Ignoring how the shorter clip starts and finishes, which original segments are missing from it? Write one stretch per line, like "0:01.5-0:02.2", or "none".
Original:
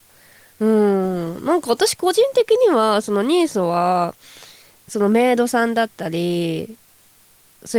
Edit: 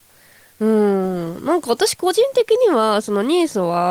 none